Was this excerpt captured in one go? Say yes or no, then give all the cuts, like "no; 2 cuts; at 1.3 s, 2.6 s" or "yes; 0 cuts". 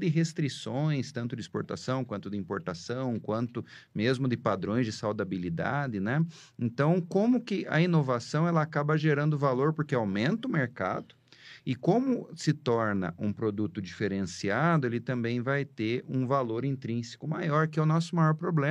yes; 0 cuts